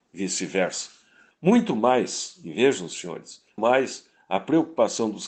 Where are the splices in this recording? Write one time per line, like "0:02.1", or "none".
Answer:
0:01.3
0:03.6